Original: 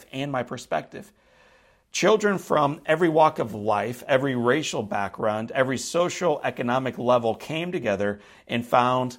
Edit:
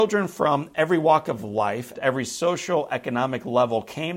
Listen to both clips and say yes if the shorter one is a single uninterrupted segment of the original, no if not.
no